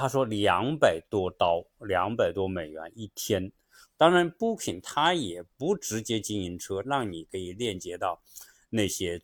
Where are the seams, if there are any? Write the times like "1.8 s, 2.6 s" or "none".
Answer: 3.8 s, 6.8 s